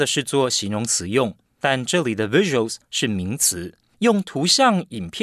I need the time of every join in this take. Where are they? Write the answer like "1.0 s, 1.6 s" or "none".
none